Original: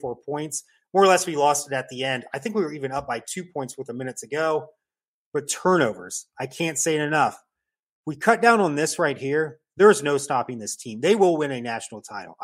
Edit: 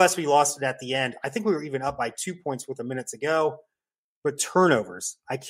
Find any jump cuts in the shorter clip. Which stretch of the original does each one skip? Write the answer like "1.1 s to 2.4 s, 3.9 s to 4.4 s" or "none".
none